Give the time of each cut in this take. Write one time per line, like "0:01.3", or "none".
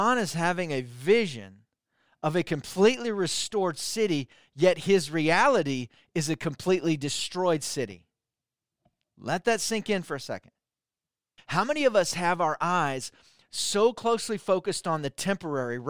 0:11.4